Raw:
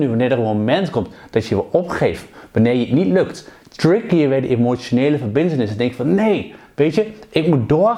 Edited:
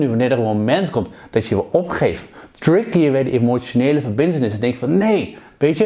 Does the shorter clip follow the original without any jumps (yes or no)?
no